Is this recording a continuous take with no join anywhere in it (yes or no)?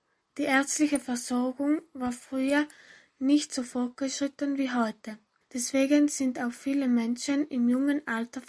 no